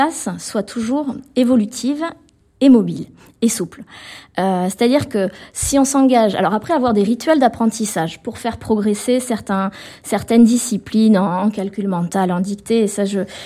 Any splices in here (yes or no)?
no